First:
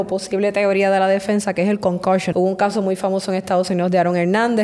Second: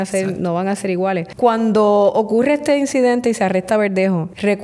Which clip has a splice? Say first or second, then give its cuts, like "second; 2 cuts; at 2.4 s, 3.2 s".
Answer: first; 1 cut; at 2.3 s